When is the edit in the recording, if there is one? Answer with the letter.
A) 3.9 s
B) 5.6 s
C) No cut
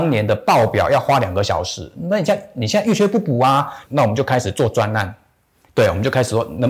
A